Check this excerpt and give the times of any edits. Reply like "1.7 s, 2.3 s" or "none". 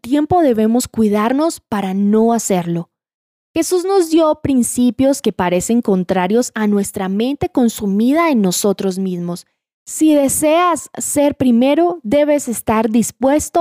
9.7 s